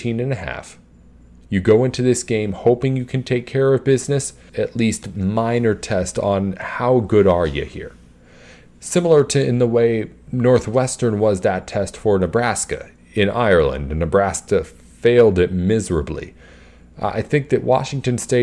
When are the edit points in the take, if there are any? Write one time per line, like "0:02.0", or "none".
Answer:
0:04.5